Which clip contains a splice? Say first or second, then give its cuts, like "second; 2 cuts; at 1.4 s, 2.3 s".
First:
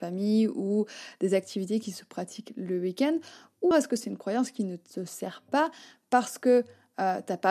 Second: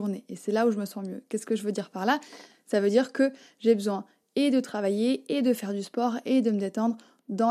first; 1 cut; at 3.7 s